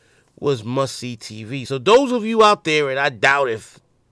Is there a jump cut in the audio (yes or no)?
no